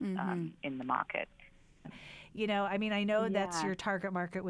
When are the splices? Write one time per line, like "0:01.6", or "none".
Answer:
0:01.8